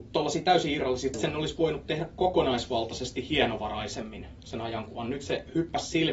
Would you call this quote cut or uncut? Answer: cut